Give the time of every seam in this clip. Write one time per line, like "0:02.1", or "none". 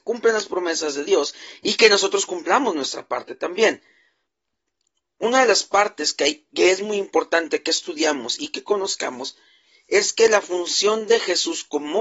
none